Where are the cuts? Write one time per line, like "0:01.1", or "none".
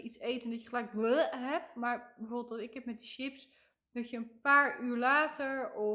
none